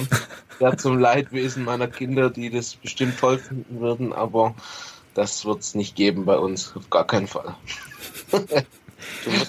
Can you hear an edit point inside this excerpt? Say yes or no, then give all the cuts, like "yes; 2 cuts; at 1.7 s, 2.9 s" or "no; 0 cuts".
no; 0 cuts